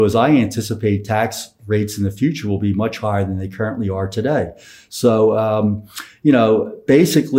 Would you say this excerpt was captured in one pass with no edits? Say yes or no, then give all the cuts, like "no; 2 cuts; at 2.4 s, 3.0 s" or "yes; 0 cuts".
yes; 0 cuts